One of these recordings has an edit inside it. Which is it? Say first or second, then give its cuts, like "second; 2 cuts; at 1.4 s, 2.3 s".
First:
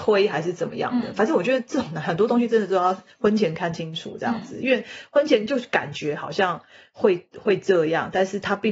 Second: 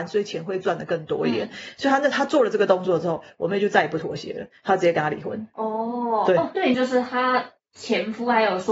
second; 1 cut; at 6.7 s